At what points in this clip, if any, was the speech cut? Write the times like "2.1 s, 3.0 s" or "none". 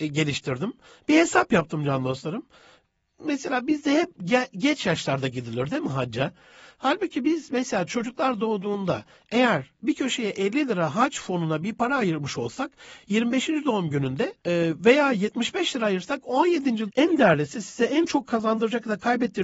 14.4 s, 16.9 s